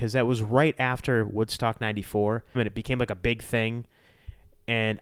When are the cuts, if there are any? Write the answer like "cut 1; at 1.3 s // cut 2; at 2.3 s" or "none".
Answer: cut 1; at 2.5 s